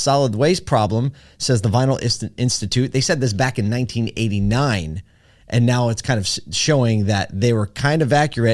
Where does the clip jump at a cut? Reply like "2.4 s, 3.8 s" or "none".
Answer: none